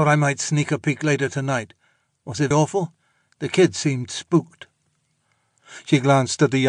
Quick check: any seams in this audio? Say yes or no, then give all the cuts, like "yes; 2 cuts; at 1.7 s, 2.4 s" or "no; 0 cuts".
yes; 1 cut; at 2.5 s